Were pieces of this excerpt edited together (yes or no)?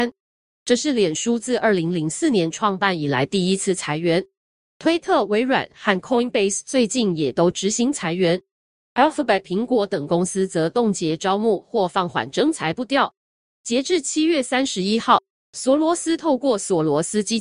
no